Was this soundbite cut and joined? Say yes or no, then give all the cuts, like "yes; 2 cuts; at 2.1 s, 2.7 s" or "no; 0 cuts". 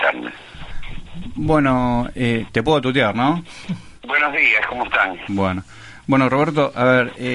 yes; 2 cuts; at 4.0 s, 5.3 s